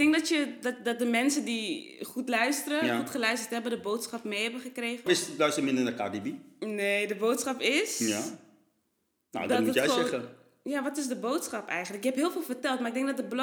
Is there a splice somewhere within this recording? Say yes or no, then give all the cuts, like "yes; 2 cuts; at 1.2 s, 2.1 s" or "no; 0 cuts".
yes; 1 cut; at 5.1 s